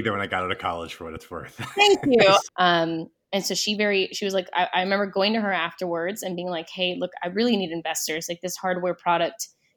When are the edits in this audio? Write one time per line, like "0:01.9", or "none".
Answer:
0:02.5